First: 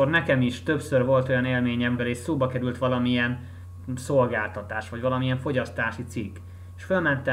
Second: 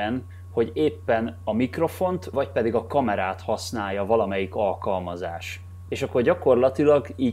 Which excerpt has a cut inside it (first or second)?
first